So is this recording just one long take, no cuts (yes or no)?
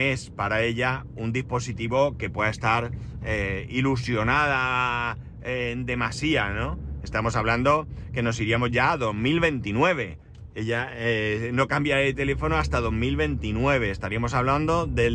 no